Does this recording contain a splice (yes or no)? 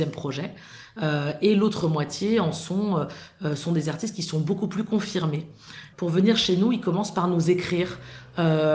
no